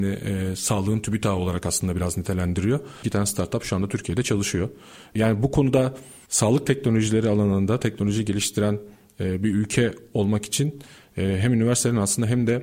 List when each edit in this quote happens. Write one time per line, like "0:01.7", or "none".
0:03.0